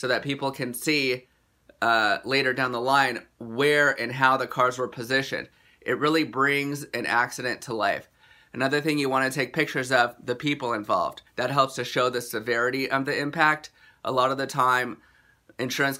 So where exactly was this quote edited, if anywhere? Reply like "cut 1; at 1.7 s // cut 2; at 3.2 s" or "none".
cut 1; at 11.3 s